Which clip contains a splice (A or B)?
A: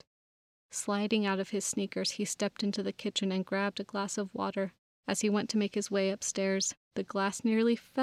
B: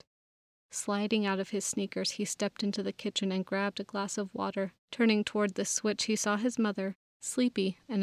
B